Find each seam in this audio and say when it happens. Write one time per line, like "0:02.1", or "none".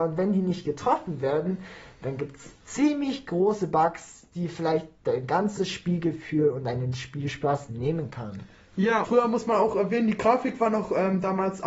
0:09.0

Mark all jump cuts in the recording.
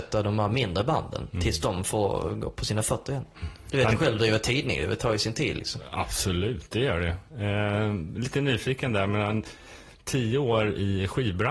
none

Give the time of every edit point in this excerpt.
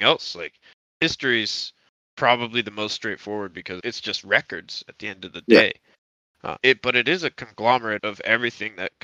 0:03.8
0:06.6
0:08.0

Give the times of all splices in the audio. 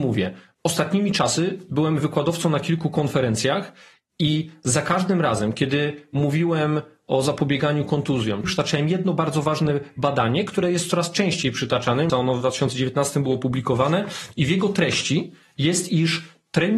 0:08.4
0:12.1

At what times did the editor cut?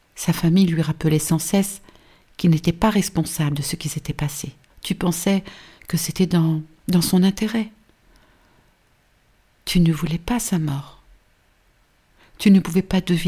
0:04.7

